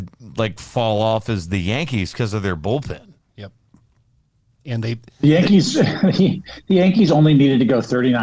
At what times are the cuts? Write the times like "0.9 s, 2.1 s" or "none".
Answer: none